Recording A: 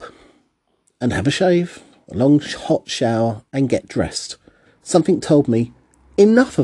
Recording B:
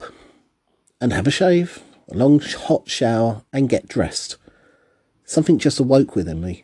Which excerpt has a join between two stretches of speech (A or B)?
A